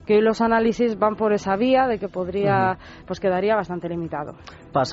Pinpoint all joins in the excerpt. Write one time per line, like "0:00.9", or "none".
0:03.0